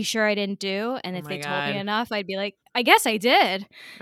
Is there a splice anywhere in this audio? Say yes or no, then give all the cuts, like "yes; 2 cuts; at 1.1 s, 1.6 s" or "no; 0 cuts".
no; 0 cuts